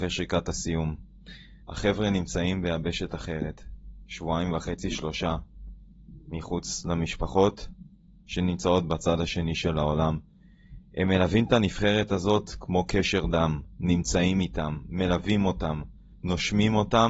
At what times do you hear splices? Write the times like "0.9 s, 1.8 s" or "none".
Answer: 1.6 s